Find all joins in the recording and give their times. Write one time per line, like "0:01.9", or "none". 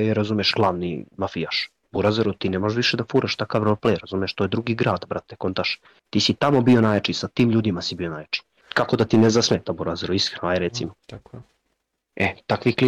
0:08.6
0:11.0